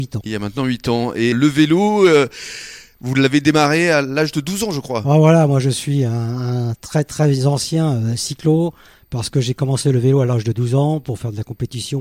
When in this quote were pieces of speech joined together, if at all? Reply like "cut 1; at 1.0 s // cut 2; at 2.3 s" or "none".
cut 1; at 1.3 s